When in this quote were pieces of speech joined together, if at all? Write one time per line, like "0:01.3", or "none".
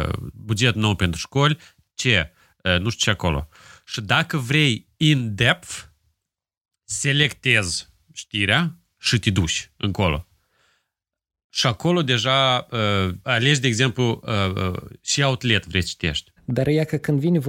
0:13.2
0:16.4